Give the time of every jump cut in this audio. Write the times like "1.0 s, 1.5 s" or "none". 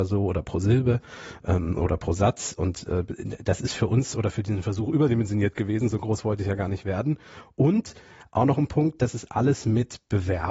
none